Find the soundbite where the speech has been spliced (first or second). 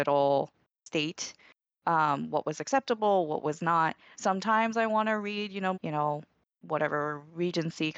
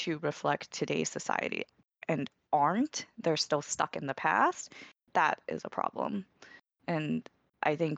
first